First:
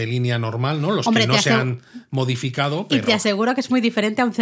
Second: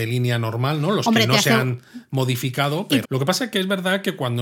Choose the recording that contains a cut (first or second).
second